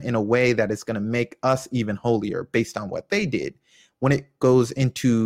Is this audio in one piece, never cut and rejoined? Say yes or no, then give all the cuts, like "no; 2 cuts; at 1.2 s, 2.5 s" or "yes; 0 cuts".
yes; 0 cuts